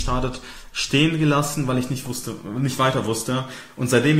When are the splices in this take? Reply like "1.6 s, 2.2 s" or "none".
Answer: none